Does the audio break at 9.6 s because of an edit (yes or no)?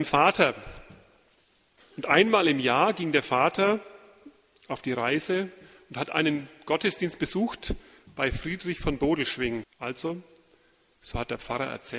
yes